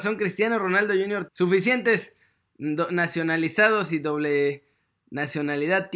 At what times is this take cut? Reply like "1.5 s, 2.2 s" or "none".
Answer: 1.3 s